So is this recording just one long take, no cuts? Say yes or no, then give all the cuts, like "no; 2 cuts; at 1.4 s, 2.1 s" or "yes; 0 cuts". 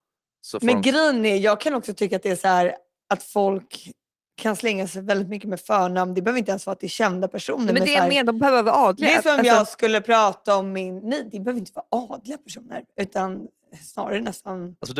yes; 0 cuts